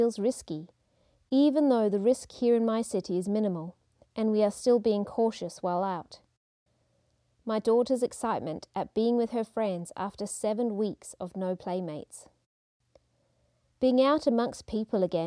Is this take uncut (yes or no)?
no